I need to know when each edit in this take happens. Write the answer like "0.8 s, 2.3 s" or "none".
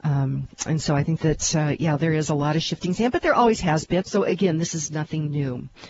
4.0 s

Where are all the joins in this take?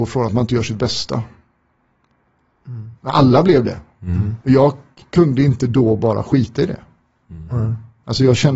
3.0 s

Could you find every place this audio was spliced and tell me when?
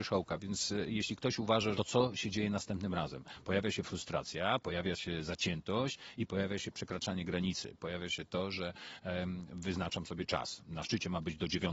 1.7 s

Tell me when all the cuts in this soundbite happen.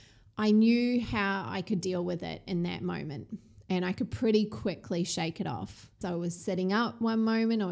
6.0 s

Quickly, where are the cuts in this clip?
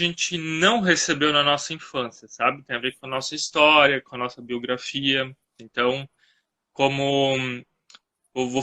5.6 s

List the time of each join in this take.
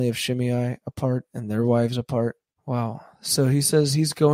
2.5 s

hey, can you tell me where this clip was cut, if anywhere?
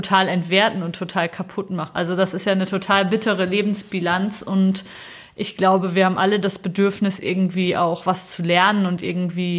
1.9 s

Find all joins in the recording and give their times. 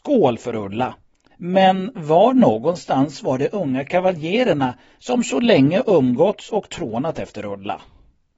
1.3 s

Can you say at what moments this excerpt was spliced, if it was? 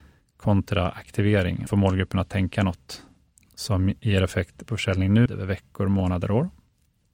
1.7 s, 5.3 s

